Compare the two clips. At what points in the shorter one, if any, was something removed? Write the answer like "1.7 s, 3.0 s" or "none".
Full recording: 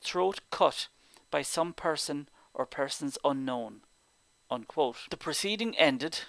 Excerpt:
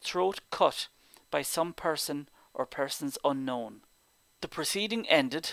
4.4 s